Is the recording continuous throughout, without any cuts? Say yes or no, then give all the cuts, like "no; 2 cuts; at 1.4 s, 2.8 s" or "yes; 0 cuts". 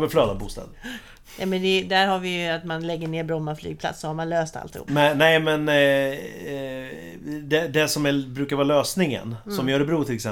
no; 1 cut; at 4.9 s